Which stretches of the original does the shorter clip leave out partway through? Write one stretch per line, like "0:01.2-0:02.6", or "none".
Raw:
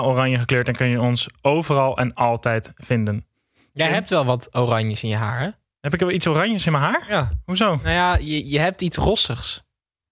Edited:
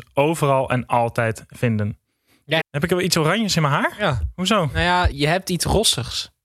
0:03.9-0:05.7
0:08.2-0:08.4